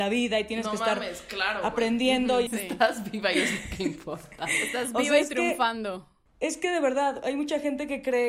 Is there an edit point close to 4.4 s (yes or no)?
no